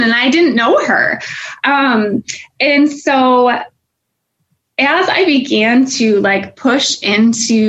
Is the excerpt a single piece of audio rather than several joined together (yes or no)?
yes